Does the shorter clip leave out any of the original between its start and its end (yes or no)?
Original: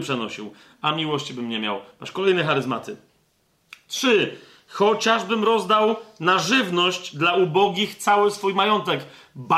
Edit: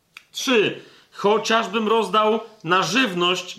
no